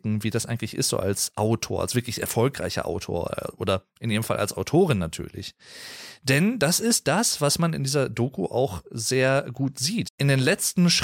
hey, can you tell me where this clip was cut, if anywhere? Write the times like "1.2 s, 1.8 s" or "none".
10.0 s